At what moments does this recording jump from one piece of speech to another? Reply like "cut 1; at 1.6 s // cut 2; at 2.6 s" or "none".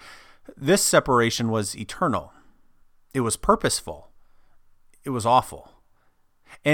none